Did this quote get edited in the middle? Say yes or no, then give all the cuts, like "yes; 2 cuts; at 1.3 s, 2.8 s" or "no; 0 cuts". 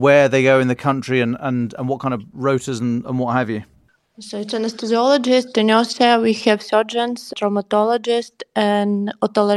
no; 0 cuts